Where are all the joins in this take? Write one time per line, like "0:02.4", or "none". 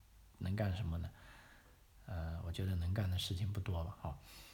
none